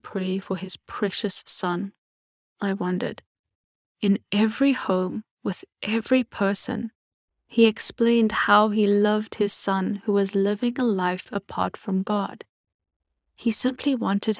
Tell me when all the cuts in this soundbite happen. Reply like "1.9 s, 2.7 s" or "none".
2.5 s, 7.3 s